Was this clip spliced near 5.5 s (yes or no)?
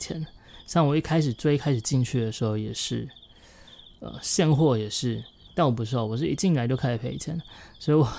yes